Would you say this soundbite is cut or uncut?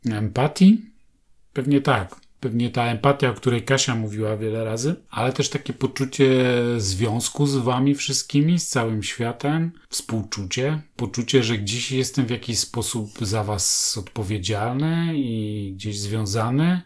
uncut